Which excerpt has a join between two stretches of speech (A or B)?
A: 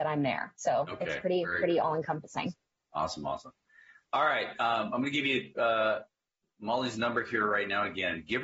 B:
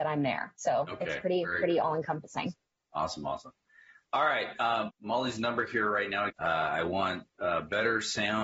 B